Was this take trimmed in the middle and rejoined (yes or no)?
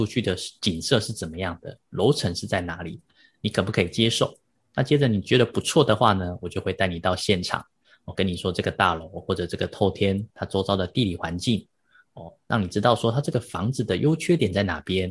no